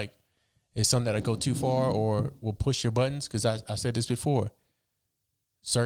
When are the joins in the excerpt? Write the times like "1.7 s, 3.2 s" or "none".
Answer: none